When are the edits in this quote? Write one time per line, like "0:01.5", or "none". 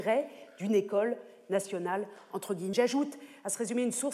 0:02.7